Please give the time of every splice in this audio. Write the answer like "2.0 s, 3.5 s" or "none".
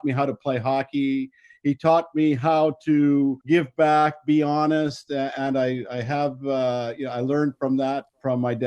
none